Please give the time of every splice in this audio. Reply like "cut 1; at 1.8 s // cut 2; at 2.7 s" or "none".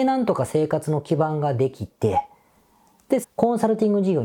cut 1; at 3.2 s

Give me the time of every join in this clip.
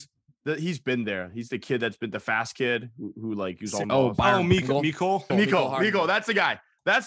cut 1; at 3.8 s // cut 2; at 5.3 s

